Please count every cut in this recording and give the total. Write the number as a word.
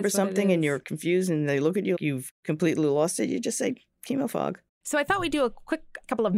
one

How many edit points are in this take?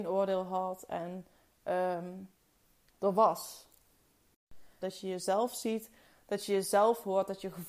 one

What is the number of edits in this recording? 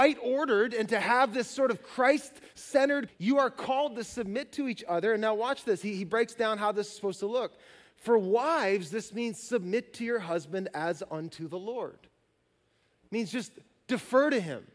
one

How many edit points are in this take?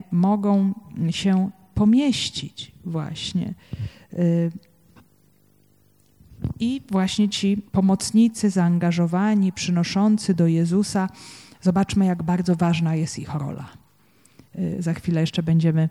one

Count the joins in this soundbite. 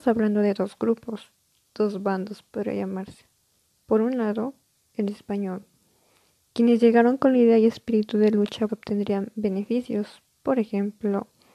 one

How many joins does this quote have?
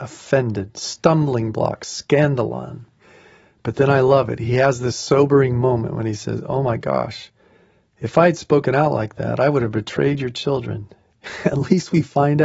zero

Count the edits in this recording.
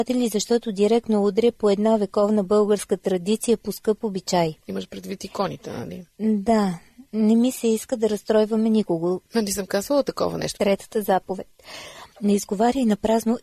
two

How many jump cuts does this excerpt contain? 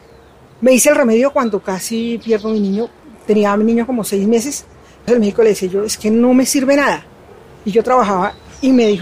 one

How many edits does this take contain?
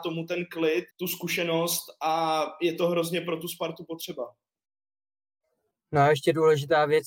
one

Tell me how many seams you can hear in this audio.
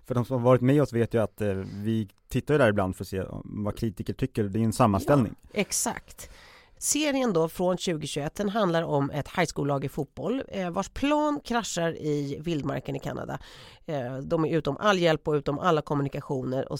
zero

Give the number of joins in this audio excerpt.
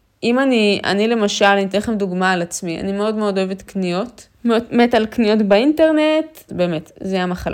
two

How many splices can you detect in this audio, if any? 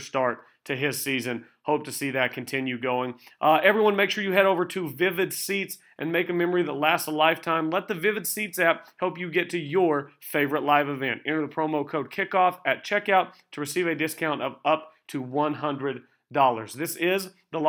zero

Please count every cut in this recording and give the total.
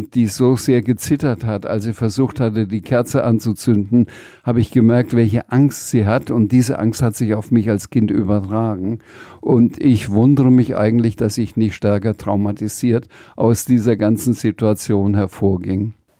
zero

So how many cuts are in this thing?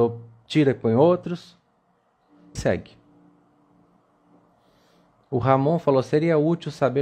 one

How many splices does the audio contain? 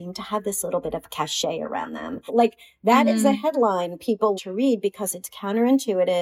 two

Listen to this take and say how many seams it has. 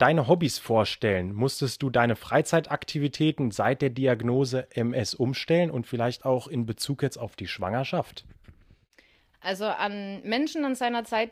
one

